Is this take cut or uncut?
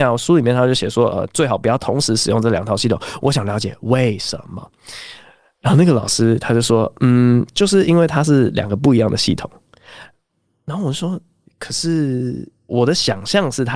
uncut